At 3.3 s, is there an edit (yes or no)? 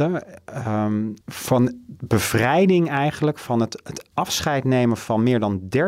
no